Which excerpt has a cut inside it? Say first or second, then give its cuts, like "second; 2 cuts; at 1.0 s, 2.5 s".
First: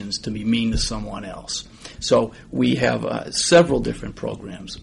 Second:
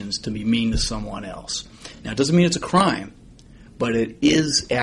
first; 1 cut; at 2.0 s